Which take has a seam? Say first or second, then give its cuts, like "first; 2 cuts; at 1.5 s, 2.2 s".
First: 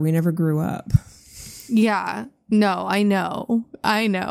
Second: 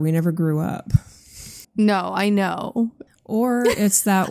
second; 2 cuts; at 1.6 s, 3.1 s